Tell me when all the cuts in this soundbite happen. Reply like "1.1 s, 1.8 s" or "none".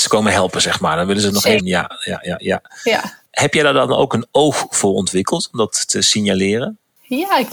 1.6 s